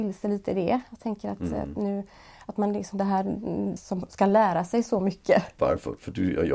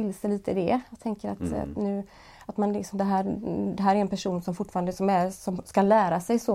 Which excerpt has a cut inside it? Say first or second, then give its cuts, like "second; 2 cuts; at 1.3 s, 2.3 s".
first; 2 cuts; at 3.8 s, 5.6 s